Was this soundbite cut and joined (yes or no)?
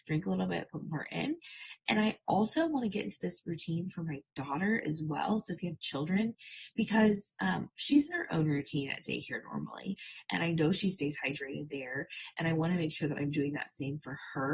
no